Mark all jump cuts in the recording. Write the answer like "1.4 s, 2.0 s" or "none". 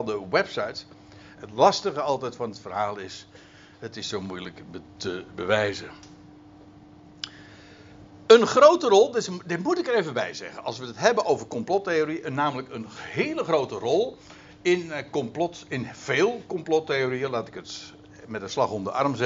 1.4 s